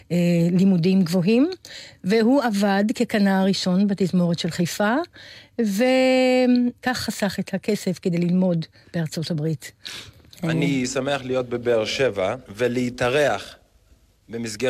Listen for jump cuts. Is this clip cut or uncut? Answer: cut